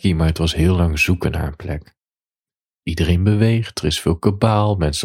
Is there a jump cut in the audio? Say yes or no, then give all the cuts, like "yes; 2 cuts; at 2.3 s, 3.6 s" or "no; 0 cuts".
yes; 1 cut; at 2.8 s